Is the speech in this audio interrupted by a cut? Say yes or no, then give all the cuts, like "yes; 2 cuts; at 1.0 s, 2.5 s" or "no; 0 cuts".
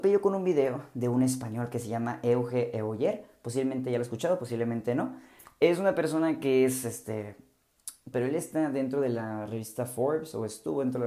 yes; 1 cut; at 8.1 s